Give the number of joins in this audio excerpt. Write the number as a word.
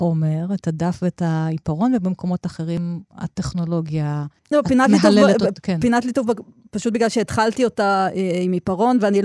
one